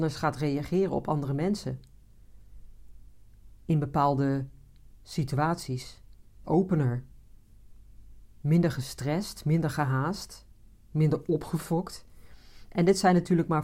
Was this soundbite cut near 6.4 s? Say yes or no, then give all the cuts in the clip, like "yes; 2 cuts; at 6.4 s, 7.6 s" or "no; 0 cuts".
yes; 1 cut; at 6.4 s